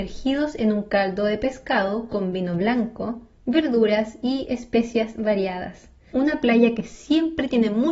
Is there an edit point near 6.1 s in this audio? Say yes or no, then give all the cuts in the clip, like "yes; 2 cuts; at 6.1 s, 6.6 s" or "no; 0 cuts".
yes; 1 cut; at 6.1 s